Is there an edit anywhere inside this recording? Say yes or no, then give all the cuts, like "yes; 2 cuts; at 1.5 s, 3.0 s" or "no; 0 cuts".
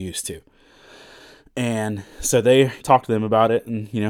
yes; 1 cut; at 2.8 s